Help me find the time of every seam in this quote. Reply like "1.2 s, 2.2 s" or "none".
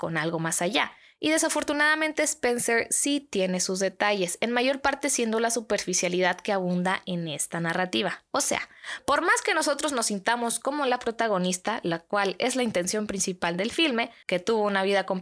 14.2 s